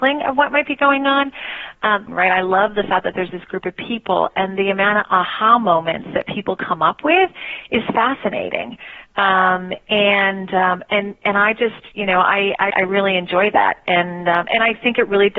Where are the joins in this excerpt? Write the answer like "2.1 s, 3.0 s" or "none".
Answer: 2.1 s, 12.7 s